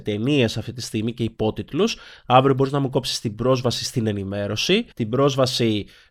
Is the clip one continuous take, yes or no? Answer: no